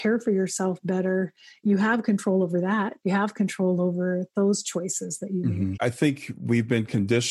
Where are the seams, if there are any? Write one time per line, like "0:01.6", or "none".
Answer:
0:05.7